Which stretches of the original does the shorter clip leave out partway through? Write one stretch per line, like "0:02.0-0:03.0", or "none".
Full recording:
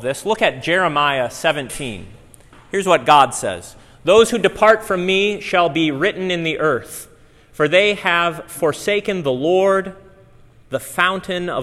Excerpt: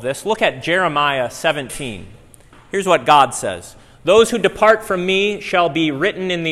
none